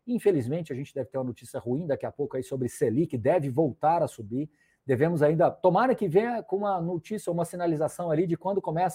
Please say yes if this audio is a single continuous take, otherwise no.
yes